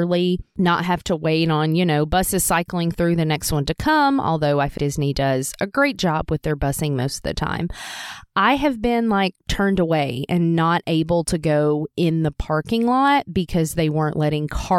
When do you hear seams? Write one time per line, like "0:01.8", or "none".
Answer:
0:04.8